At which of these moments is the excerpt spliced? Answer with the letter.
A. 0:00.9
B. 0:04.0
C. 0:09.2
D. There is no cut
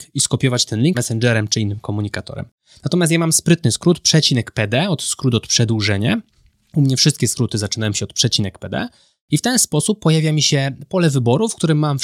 A